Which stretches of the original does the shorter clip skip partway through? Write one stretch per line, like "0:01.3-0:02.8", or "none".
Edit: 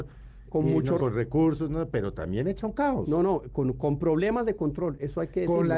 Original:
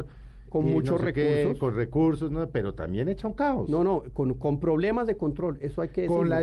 0:01.0-0:01.6